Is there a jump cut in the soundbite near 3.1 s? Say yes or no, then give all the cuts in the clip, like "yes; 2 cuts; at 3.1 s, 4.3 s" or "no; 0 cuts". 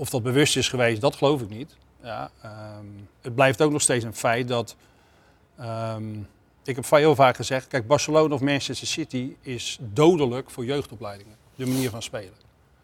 yes; 1 cut; at 3.1 s